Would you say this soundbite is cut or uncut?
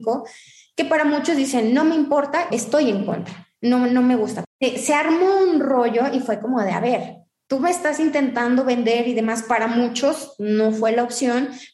cut